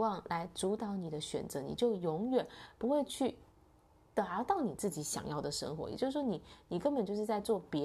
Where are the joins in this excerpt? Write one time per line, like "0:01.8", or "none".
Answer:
none